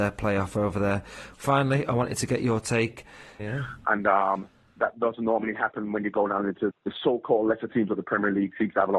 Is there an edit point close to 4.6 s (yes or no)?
no